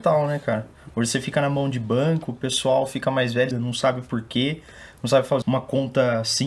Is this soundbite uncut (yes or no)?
no